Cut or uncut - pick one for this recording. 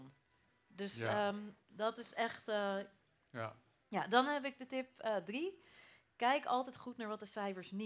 uncut